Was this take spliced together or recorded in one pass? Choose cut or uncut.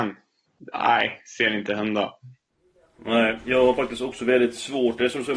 uncut